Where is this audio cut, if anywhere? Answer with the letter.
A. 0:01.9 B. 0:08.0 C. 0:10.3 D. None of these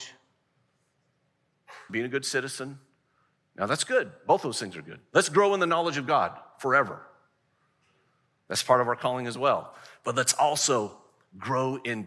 A